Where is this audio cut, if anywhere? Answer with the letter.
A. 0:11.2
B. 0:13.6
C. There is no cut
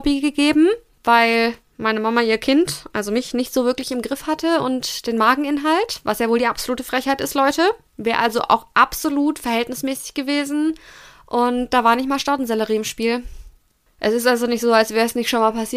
C